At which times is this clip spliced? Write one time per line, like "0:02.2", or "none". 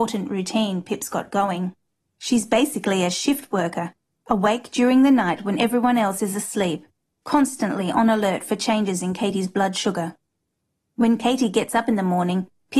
none